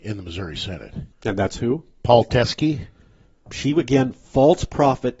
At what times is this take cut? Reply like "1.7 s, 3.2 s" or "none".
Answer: 1.1 s, 3.5 s